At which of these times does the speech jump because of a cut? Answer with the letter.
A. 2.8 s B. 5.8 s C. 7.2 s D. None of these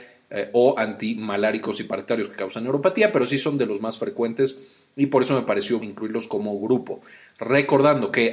B